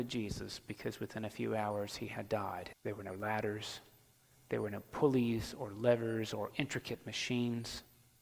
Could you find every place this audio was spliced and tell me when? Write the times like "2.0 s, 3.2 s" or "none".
2.7 s